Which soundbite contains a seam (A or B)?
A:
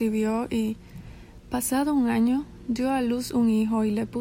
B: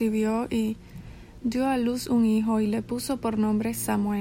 B